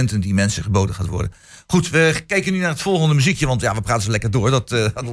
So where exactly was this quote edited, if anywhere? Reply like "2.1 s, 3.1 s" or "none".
none